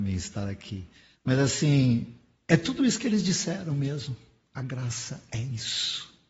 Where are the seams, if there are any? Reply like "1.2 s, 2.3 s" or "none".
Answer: none

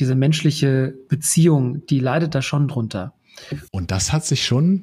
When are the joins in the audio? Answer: 3.7 s

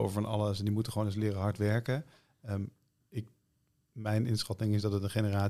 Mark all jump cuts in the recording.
none

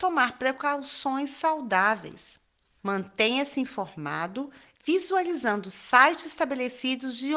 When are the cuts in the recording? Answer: 2.8 s

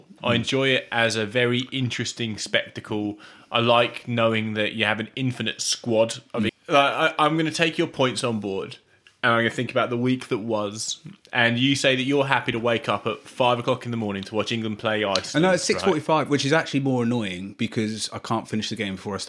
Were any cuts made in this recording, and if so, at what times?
6.5 s

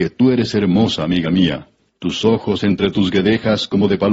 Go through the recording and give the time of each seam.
1.9 s

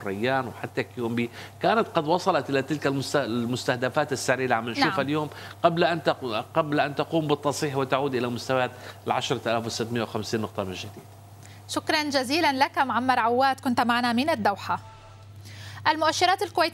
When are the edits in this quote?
none

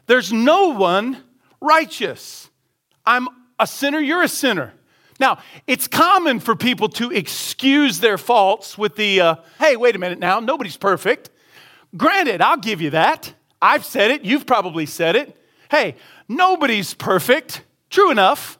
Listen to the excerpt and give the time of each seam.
9.6 s

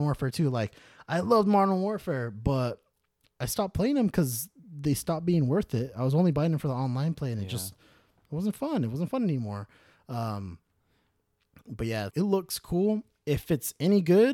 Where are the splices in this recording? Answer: 12.1 s

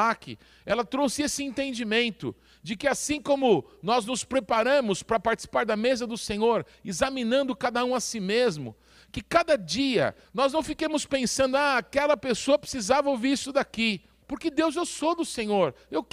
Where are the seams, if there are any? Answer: 10.2 s, 14.2 s

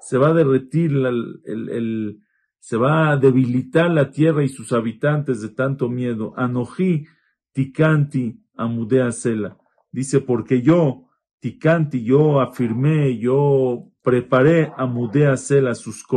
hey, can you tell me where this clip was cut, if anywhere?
14.0 s

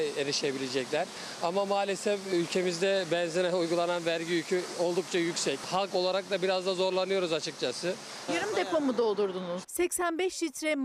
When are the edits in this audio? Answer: 8.3 s, 9.6 s

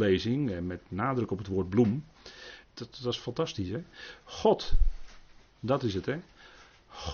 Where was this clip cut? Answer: 2.6 s

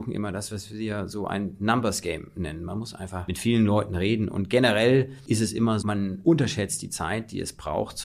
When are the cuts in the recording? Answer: 5.8 s

